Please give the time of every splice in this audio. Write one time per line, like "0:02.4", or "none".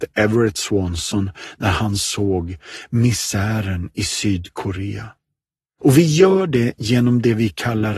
0:05.8